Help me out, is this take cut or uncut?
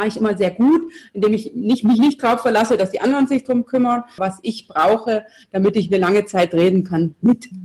cut